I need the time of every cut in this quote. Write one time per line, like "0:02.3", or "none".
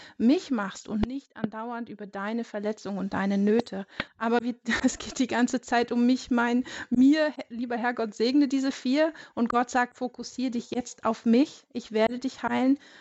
0:04.1